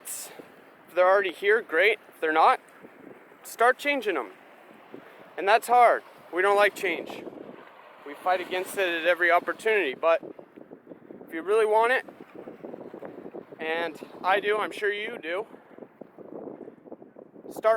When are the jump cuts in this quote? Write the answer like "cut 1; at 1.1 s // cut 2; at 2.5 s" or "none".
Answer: none